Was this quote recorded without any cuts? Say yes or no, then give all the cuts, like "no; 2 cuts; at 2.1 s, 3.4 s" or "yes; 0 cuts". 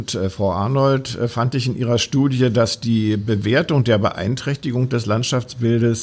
yes; 0 cuts